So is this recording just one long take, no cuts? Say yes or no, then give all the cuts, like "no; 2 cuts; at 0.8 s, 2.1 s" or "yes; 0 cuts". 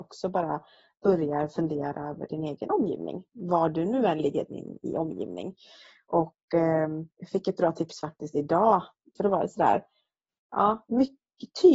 no; 2 cuts; at 7.1 s, 9.2 s